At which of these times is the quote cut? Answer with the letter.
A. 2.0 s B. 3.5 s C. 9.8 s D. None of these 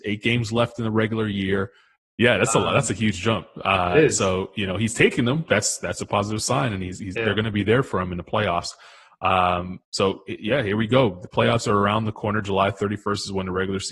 A